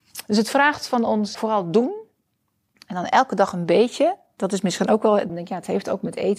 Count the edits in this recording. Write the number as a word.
two